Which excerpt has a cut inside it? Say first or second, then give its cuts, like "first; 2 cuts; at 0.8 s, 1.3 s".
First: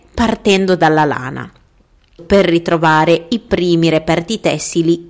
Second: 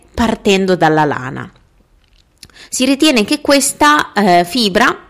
first; 1 cut; at 2.2 s